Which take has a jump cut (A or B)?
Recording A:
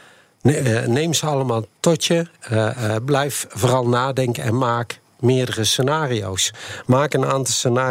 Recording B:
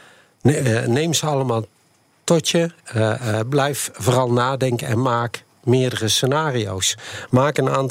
A